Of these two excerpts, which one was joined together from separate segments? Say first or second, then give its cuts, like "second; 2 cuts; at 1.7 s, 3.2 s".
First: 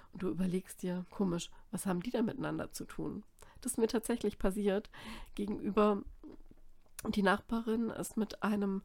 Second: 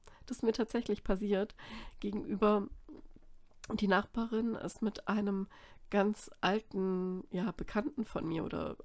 first; 1 cut; at 1.1 s